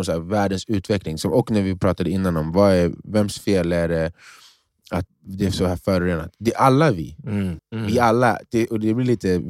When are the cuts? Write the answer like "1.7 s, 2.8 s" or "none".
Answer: 5.1 s, 7.6 s